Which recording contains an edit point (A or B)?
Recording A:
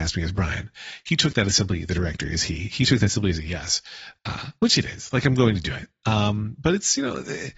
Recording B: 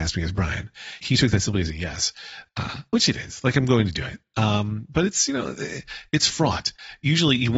B